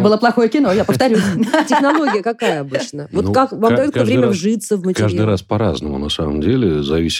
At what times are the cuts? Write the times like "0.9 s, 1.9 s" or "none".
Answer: none